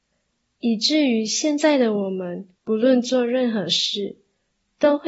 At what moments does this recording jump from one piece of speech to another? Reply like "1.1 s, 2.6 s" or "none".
2.6 s